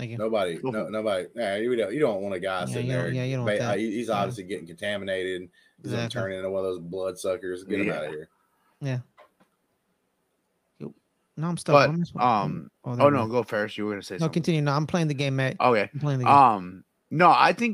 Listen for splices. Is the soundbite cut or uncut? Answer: uncut